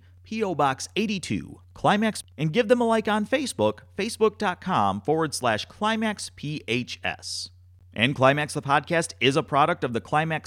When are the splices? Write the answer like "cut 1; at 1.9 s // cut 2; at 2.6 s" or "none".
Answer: cut 1; at 2.2 s